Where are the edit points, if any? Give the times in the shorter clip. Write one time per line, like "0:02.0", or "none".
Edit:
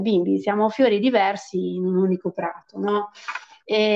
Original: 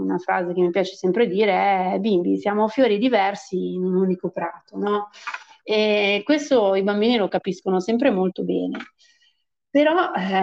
none